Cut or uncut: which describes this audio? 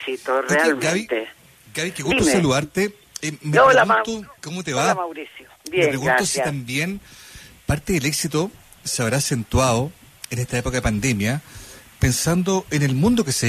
cut